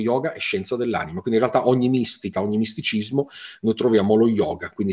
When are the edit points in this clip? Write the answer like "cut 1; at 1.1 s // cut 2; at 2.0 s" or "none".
none